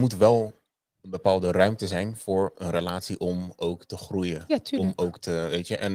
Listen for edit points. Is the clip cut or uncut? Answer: uncut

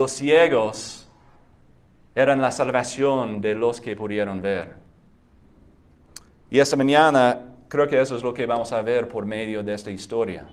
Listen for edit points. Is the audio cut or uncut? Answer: uncut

